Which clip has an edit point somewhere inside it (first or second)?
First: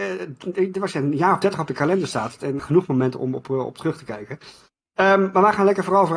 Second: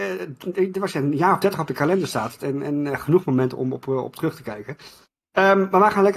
first